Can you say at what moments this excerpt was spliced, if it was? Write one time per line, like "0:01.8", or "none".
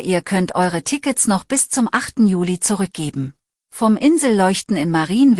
0:03.7